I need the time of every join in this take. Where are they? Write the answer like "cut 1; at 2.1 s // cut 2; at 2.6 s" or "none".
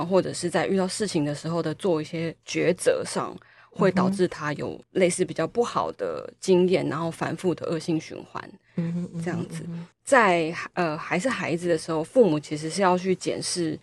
cut 1; at 9.9 s